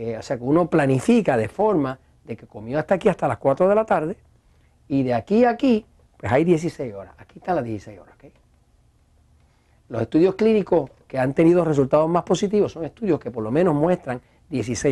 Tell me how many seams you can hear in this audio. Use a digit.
0